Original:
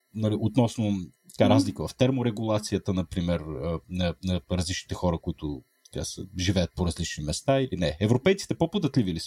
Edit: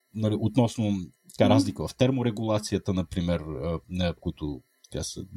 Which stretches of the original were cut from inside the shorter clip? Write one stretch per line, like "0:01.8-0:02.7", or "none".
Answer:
0:04.2-0:05.2